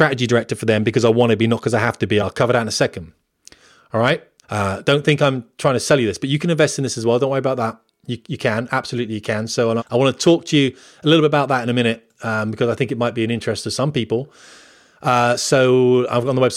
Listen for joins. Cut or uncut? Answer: cut